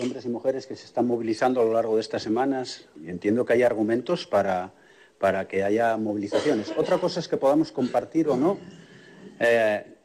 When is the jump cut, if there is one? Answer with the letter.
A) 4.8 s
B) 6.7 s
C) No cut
C